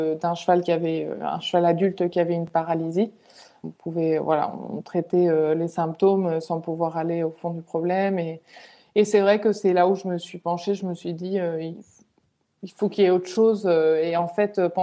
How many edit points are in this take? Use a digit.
1